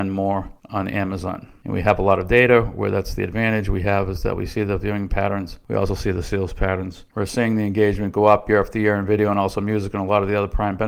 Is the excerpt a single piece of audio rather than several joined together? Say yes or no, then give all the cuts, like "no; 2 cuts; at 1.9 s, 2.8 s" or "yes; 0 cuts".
no; 1 cut; at 7.1 s